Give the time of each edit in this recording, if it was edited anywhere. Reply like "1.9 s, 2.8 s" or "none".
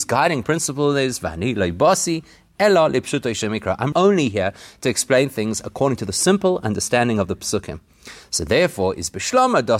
3.9 s